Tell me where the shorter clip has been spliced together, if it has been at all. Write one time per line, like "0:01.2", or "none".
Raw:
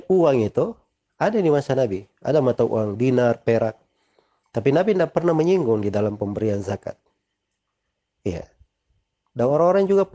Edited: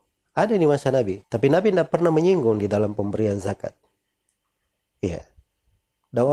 0:01.2